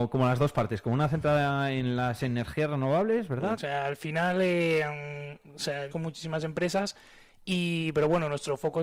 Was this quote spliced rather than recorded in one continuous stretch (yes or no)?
yes